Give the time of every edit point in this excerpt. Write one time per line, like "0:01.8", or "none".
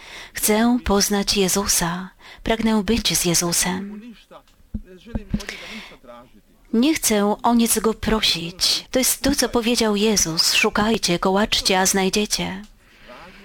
0:08.9